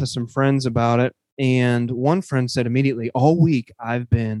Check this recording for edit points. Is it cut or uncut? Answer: uncut